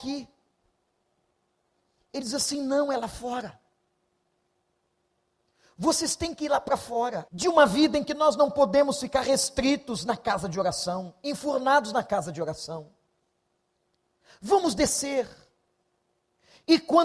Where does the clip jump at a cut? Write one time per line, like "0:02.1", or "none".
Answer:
0:07.3